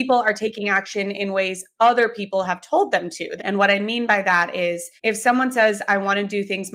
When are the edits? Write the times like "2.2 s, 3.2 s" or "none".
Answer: 3.4 s, 5.0 s